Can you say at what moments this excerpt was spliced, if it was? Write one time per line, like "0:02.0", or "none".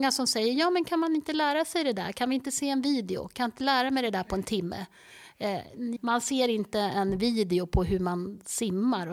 0:06.0